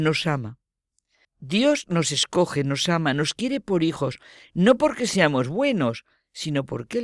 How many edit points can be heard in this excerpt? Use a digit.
1